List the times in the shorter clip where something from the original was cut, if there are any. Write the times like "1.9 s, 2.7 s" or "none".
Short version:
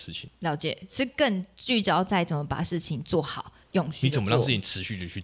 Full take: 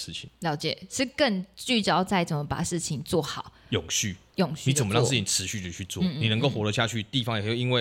3.6 s